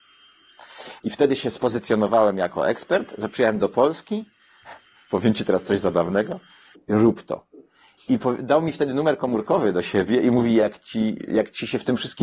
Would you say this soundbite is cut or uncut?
cut